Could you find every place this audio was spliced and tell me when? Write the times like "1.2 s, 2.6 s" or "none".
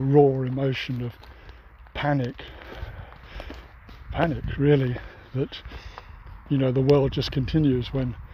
none